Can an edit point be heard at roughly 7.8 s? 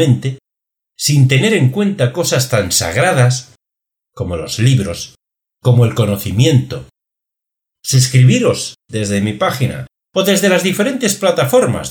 yes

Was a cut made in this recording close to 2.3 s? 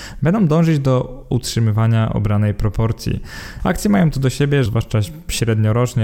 no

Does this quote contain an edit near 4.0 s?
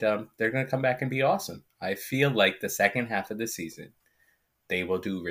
no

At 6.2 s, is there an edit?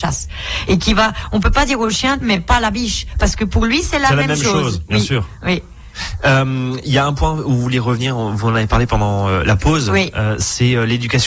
no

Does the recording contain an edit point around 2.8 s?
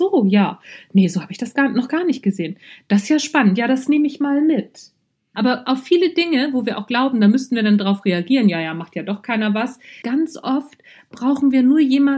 no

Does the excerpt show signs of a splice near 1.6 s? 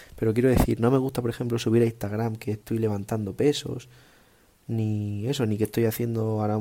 no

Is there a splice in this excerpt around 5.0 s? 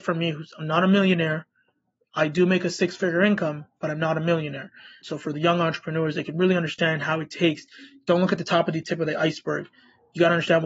yes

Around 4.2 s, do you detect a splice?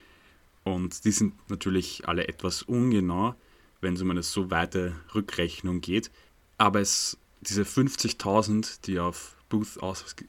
no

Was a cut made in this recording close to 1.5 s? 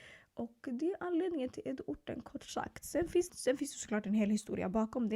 no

